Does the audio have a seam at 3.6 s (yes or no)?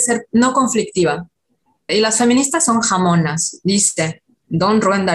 no